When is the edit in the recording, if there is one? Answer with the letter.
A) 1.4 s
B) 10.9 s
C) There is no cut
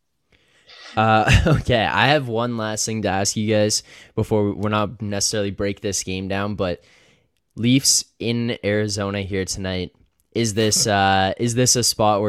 C